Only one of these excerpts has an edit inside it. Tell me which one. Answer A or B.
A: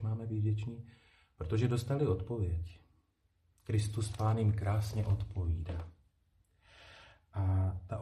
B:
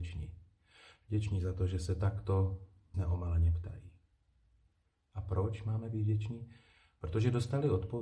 B